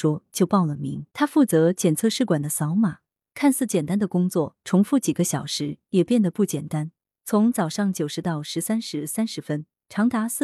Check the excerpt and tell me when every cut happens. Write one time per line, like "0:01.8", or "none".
0:01.1